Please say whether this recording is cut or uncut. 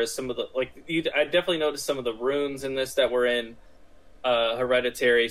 uncut